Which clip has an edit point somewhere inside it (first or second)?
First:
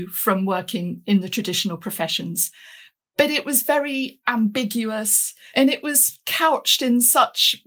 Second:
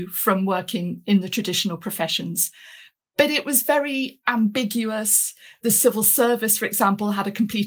first